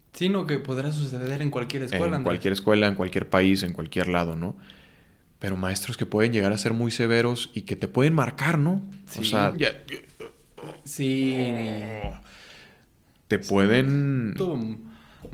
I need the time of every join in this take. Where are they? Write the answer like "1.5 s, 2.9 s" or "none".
9.5 s, 14.4 s